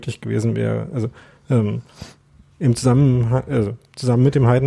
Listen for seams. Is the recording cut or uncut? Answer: uncut